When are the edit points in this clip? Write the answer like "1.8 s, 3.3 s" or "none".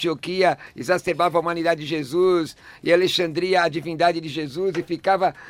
none